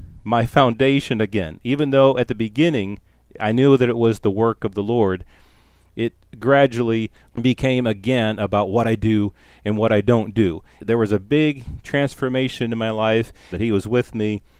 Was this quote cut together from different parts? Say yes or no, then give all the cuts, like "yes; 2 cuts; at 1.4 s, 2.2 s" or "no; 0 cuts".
yes; 2 cuts; at 10.8 s, 13.5 s